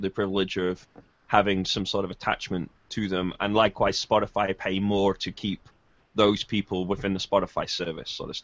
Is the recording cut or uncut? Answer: uncut